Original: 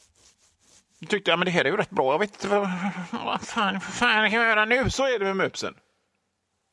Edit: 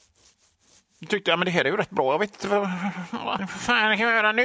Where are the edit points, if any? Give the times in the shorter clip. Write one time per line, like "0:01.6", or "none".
0:03.4